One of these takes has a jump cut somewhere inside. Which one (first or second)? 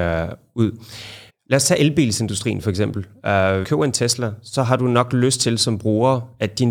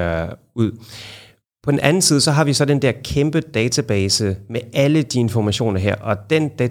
first